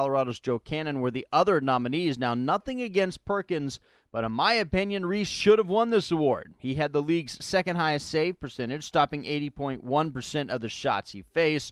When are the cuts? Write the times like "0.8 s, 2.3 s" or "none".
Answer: none